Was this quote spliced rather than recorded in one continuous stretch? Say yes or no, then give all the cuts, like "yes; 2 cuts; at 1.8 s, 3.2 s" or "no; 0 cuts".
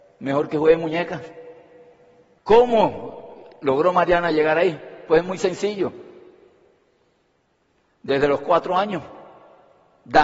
yes; 1 cut; at 2.4 s